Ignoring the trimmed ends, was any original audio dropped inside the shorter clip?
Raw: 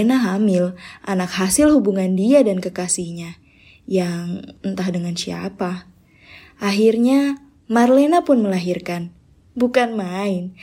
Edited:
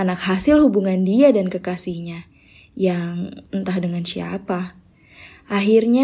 no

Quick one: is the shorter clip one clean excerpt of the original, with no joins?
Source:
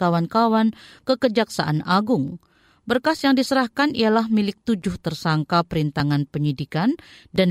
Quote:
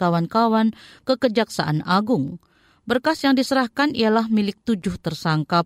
yes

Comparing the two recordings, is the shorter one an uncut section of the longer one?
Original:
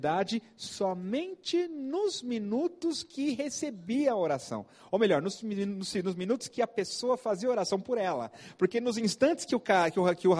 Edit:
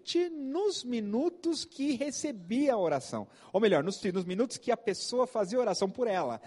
no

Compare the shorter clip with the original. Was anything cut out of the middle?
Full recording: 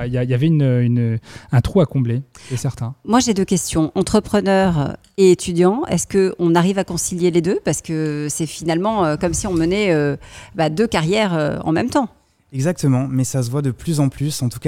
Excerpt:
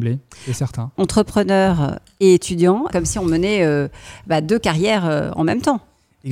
yes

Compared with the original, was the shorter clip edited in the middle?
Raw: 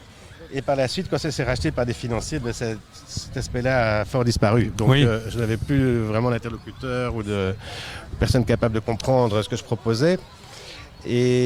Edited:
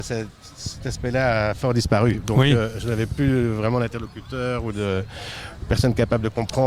no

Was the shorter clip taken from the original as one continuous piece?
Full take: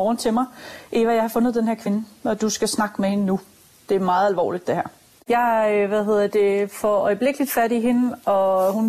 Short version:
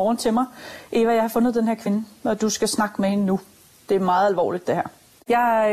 yes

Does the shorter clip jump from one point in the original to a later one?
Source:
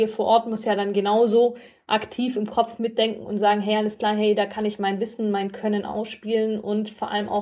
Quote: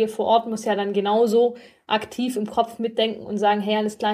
no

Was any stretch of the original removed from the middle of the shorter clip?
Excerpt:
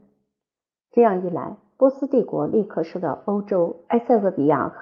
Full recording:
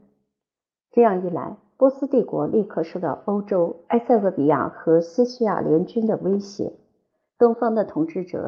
no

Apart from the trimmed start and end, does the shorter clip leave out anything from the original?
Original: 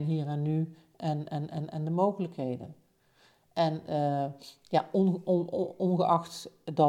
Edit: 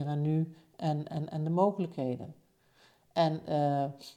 yes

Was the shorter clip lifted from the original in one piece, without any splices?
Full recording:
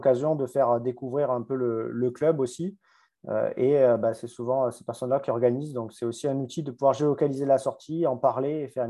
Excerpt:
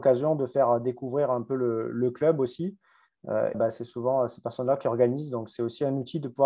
no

